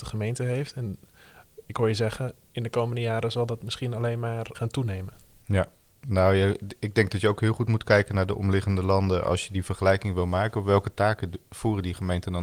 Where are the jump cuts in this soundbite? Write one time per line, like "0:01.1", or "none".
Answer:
0:04.5